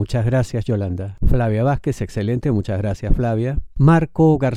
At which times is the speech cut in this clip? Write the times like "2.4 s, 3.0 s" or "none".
1.2 s